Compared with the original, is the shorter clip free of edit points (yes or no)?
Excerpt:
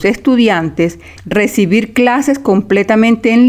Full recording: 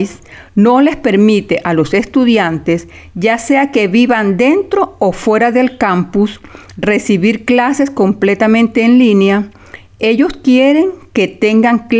no